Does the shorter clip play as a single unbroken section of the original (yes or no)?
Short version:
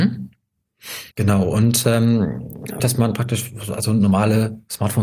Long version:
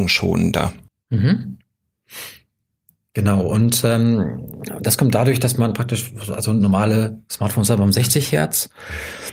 no